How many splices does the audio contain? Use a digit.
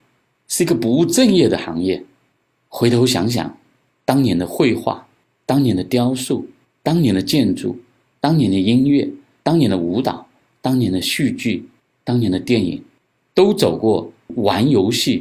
1